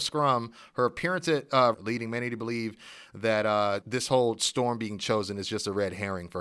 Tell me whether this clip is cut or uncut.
cut